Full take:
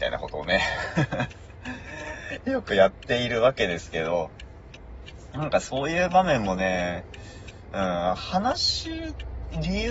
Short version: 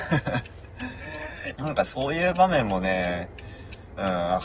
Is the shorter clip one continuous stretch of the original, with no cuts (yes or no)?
no